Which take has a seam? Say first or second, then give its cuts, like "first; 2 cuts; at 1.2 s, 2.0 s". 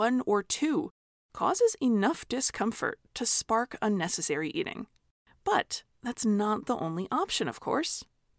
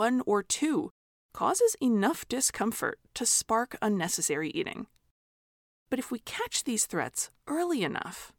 first; 1 cut; at 5.2 s